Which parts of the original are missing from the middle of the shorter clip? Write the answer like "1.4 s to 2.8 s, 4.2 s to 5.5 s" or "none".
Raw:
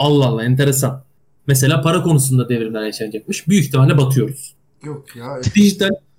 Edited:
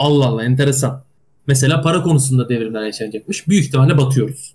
none